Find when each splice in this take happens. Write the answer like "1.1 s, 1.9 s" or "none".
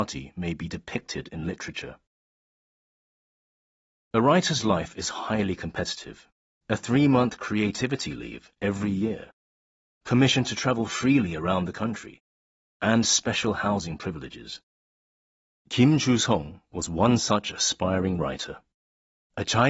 6.5 s